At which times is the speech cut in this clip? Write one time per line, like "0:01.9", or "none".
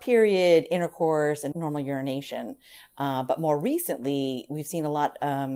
0:01.5